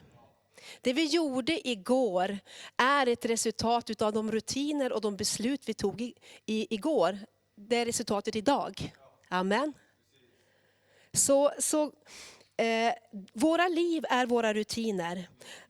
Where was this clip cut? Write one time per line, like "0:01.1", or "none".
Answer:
none